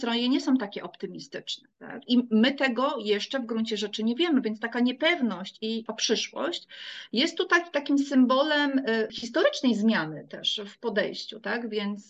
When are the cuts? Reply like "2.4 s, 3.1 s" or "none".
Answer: 2.0 s, 5.9 s